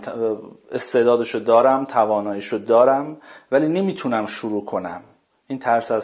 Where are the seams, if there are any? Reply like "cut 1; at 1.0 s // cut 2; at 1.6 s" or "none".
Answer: none